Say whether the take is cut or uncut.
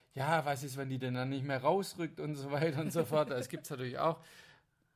uncut